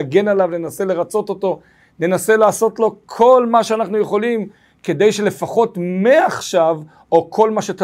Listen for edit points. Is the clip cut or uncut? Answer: uncut